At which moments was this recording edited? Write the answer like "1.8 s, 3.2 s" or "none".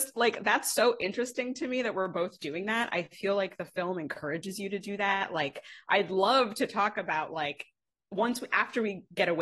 none